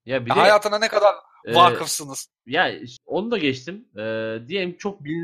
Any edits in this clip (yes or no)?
yes